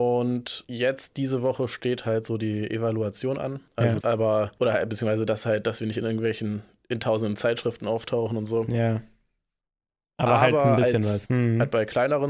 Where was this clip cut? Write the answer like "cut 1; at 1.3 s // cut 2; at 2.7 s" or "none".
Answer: cut 1; at 4.0 s // cut 2; at 11.3 s